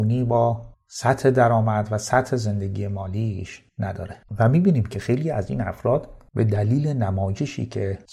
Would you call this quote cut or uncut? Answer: uncut